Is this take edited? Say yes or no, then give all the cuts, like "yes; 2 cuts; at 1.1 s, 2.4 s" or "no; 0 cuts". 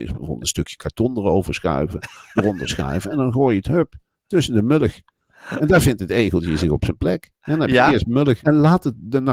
yes; 1 cut; at 8.4 s